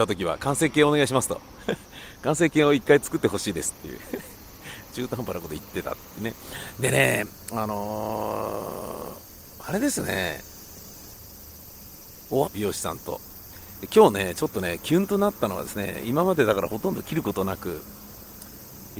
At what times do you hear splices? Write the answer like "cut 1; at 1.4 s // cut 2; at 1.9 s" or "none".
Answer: cut 1; at 12.5 s